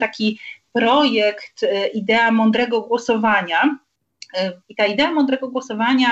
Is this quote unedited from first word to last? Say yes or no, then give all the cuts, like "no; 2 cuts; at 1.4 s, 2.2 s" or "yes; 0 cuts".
no; 1 cut; at 4.6 s